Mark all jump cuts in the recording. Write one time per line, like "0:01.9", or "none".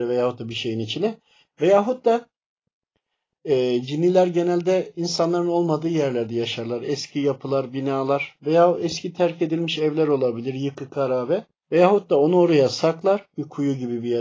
0:01.4
0:11.6